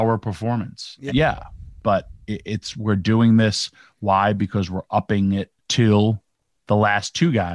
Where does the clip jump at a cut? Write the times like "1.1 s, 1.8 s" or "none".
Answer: 1.1 s, 5.6 s